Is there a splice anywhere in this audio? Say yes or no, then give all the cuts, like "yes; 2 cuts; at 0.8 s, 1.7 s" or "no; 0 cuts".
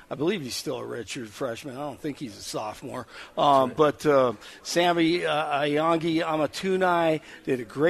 no; 0 cuts